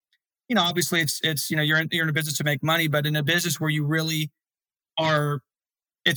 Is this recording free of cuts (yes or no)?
yes